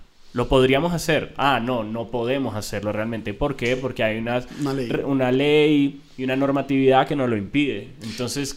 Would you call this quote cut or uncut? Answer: uncut